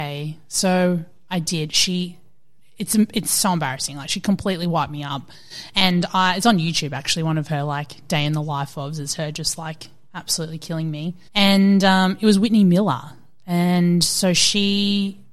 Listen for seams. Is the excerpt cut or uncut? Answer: cut